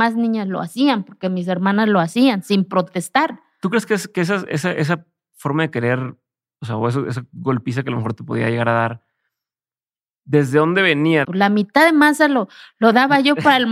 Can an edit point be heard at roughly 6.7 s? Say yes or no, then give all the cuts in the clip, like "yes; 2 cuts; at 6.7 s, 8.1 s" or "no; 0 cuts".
no; 1 cut; at 11.2 s